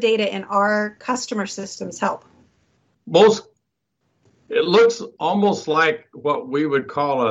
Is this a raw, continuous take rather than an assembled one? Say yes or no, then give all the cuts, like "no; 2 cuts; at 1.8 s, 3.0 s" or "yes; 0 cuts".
yes; 0 cuts